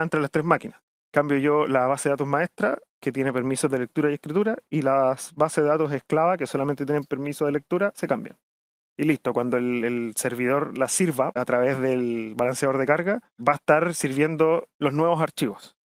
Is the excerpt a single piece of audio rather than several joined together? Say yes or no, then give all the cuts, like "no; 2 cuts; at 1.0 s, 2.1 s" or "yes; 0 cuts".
no; 2 cuts; at 8.8 s, 11.3 s